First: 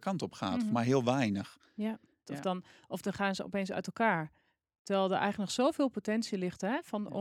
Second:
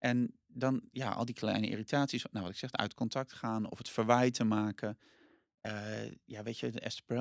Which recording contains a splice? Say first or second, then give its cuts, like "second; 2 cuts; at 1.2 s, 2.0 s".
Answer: first; 1 cut; at 2.3 s